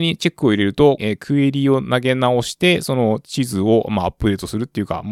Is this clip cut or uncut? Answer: cut